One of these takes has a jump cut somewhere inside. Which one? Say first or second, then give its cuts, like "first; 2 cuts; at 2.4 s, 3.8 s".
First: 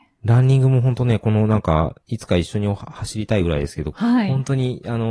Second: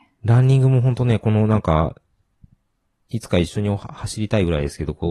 first; 2 cuts; at 2.0 s, 3.9 s